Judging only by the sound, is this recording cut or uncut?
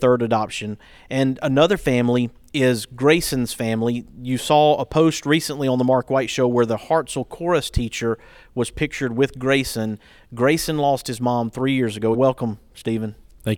cut